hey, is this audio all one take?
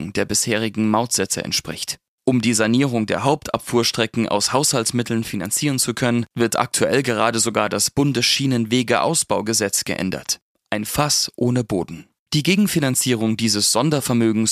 no; 2 cuts; at 10.5 s, 12.3 s

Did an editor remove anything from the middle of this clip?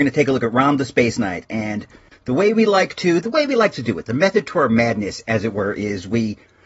no; 0 cuts

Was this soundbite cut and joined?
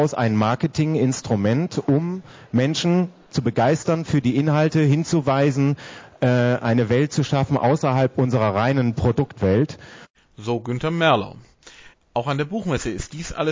yes; 1 cut; at 11.9 s

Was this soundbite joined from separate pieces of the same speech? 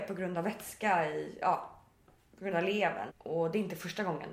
yes; 1 cut; at 3.1 s

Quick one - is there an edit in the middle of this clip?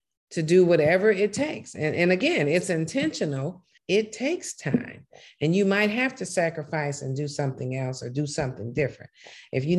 yes; 1 cut; at 3.8 s

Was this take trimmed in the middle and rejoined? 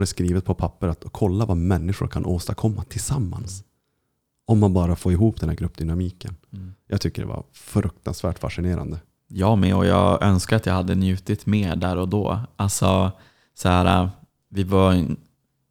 no; 0 cuts

